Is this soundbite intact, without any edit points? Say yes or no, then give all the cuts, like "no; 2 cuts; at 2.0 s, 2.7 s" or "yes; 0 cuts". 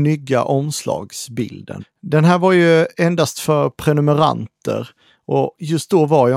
no; 1 cut; at 1.8 s